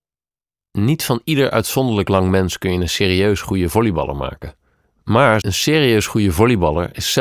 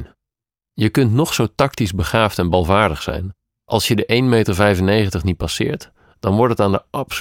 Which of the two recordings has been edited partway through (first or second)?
first